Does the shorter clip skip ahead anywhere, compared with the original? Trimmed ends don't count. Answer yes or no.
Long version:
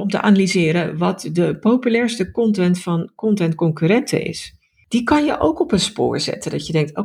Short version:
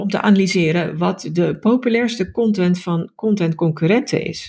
no